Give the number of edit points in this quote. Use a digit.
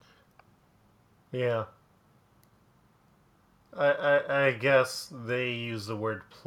0